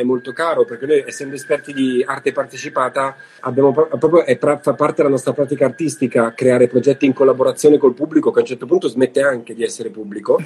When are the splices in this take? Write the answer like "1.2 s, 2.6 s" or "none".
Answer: 3.4 s